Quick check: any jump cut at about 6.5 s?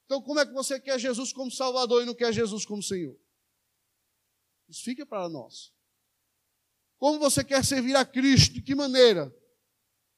no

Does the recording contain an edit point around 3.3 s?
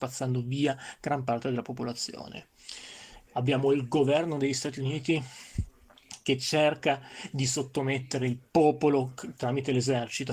yes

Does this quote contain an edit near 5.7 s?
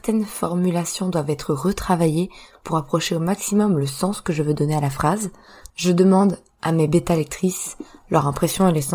yes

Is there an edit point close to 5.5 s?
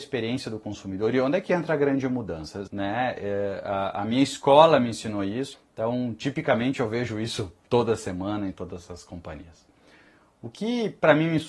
yes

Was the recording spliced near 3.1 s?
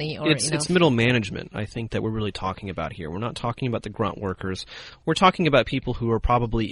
no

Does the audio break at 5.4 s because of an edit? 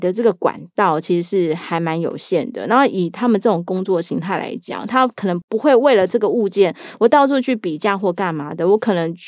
yes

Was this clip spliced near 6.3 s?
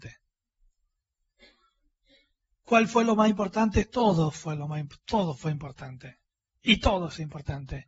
no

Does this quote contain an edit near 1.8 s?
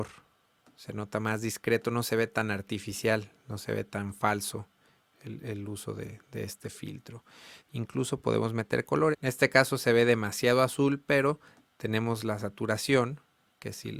no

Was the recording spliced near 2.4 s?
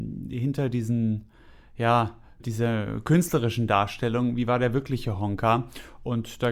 yes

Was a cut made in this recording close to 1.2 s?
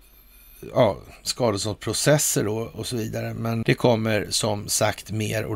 no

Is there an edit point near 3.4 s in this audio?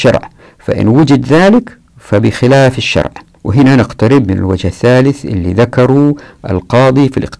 yes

